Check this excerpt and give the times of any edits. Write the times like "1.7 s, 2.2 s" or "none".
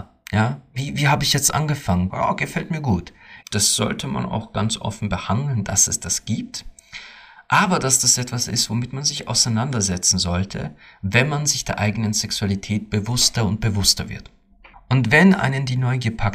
2.1 s, 3.4 s, 14.7 s